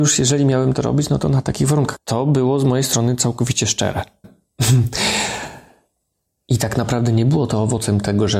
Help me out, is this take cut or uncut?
cut